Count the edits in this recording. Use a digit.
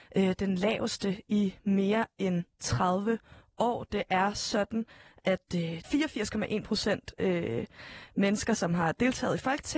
1